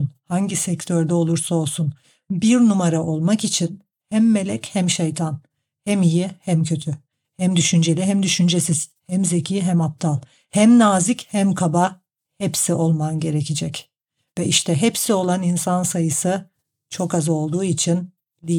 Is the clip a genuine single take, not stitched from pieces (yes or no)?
yes